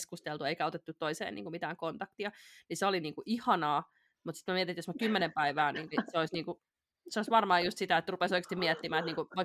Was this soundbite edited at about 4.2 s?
no; 1 cut; at 5.9 s

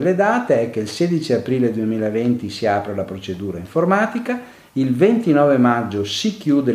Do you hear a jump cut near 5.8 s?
no; 0 cuts

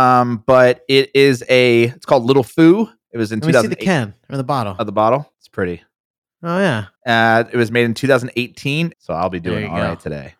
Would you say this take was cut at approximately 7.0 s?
yes; 3 cuts; at 5.3 s, 7.0 s, 8.9 s

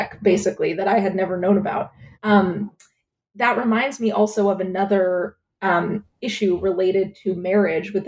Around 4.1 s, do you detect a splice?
no; 1 cut; at 2.1 s

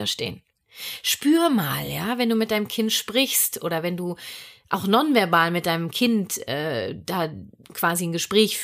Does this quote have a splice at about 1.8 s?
no; 0 cuts

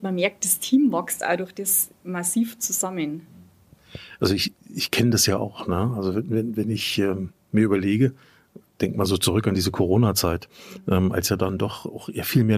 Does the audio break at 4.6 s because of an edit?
yes; 1 cut; at 4.6 s

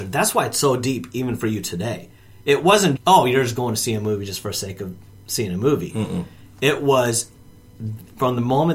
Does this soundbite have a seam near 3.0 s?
yes; 1 cut; at 3.0 s

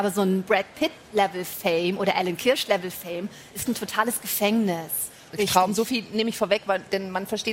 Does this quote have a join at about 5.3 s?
yes; 2 cuts; at 3.7 s, 5.3 s

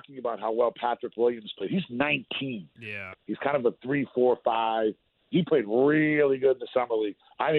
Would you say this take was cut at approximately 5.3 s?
yes; 2 cuts; at 3.1 s, 5.3 s

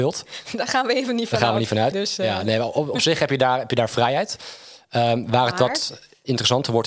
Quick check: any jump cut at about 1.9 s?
yes; 1 cut; at 1.9 s

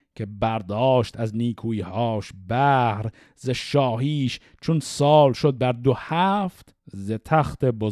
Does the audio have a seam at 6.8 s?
yes; 1 cut; at 6.8 s

